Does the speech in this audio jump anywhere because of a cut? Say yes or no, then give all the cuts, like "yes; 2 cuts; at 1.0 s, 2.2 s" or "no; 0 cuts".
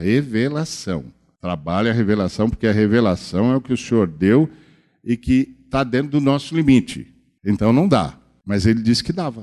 yes; 1 cut; at 7.4 s